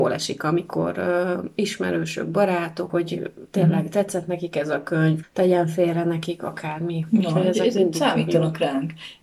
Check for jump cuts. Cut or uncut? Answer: cut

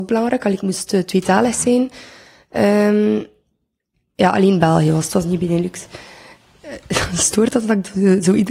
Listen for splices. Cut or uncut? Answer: uncut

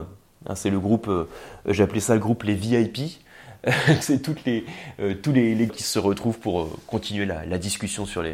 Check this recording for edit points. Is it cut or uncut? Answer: cut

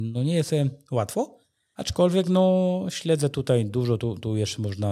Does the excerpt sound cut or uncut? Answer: uncut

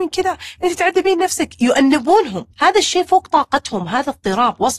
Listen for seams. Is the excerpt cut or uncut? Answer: cut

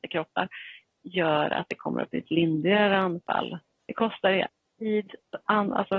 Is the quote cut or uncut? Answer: cut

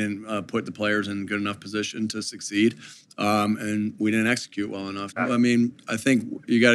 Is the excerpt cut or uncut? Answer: cut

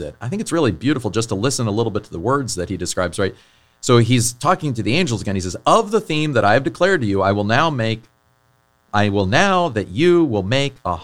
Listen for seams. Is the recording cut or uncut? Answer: uncut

